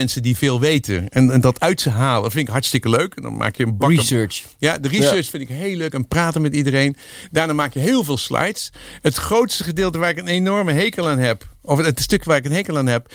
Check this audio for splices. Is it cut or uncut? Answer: uncut